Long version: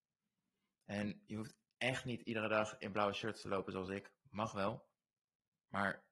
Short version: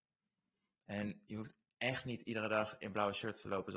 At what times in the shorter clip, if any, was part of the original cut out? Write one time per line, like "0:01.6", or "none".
none

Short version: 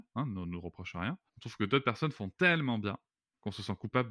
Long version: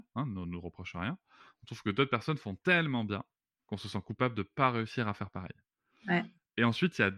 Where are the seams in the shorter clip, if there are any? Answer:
0:01.3

